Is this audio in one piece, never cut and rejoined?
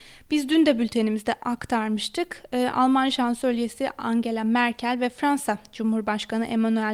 yes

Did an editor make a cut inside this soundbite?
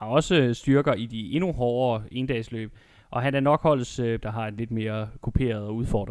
yes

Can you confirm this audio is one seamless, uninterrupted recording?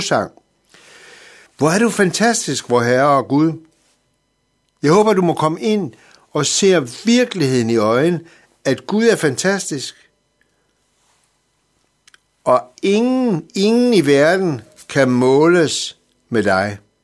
no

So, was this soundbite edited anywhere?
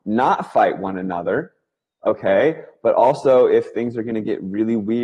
no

